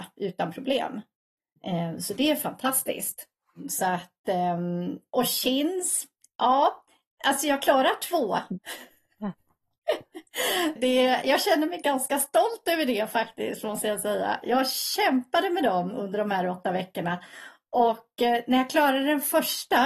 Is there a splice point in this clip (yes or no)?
yes